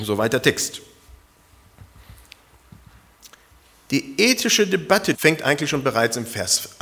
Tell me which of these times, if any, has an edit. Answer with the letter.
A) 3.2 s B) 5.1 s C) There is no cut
B